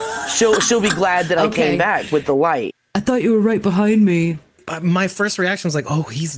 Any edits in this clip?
no; 0 cuts

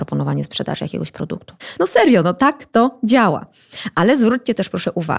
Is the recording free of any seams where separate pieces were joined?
no; 1 cut; at 1.8 s

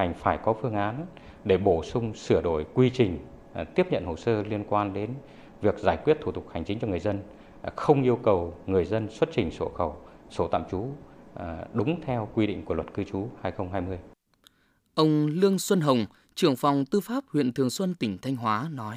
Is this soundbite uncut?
yes; 0 cuts

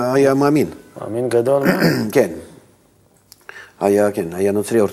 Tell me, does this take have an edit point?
no; 0 cuts

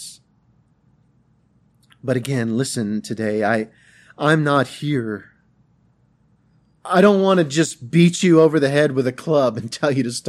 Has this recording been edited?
no; 0 cuts

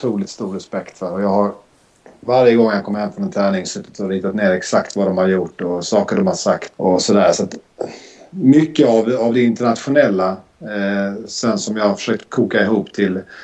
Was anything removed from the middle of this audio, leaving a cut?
yes; 1 cut; at 6.7 s

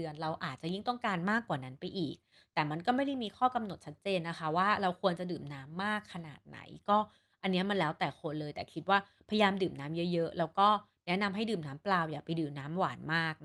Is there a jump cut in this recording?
no; 0 cuts

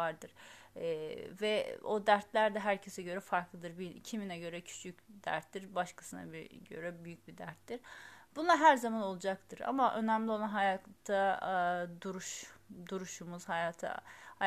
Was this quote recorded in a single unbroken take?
yes; 0 cuts

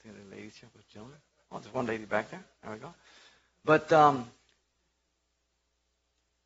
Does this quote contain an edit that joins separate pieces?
no; 0 cuts

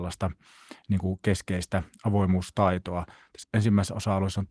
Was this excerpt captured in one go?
no; 1 cut; at 3.4 s

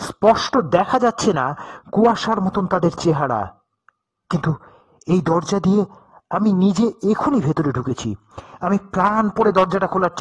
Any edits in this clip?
yes; 1 cut; at 7.2 s

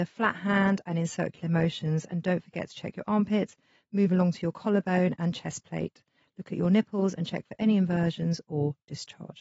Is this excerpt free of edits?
yes; 0 cuts

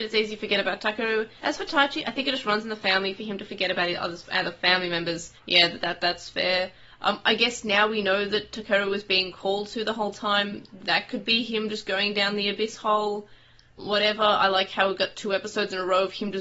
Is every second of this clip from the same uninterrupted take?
yes; 0 cuts

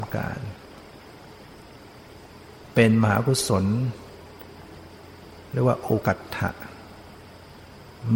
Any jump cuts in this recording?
yes; 1 cut; at 6.0 s

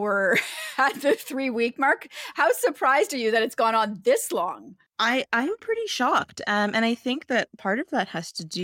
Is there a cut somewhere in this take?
no; 0 cuts

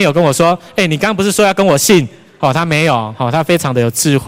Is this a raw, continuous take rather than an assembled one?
yes; 0 cuts

